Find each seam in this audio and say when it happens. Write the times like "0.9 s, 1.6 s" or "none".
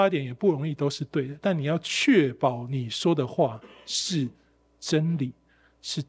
none